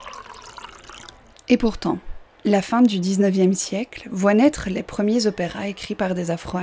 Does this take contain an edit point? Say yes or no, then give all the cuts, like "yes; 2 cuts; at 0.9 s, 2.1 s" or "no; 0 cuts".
yes; 1 cut; at 1.3 s